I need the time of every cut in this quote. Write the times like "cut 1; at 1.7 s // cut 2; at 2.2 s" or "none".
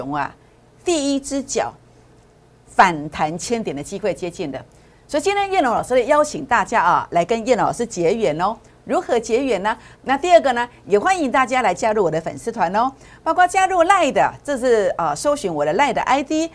cut 1; at 10.0 s